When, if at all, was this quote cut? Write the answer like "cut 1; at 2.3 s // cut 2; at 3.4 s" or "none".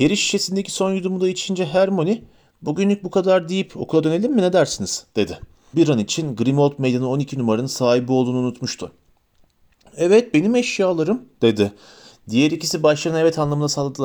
cut 1; at 5.7 s // cut 2; at 12.1 s